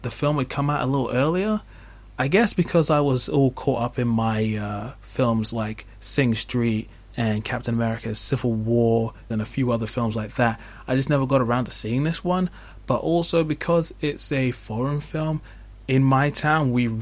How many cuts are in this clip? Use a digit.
1